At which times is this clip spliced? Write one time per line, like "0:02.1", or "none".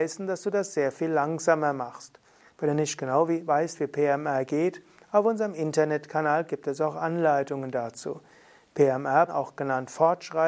0:09.3